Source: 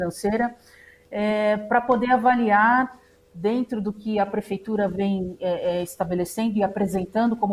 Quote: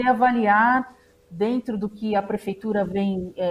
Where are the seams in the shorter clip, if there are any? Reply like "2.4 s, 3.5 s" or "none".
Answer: none